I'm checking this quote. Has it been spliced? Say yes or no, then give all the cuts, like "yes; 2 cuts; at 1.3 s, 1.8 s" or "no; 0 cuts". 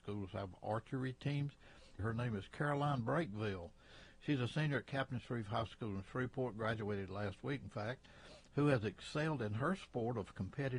yes; 1 cut; at 2.0 s